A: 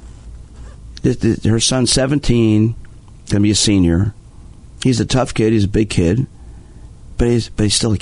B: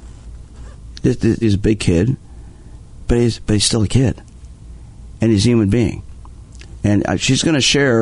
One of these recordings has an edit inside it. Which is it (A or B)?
B